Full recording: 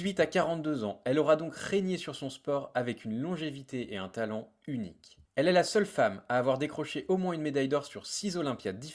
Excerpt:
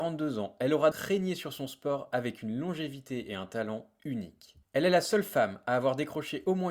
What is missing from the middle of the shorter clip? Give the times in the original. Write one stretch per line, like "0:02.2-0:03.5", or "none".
0:01.4-0:01.5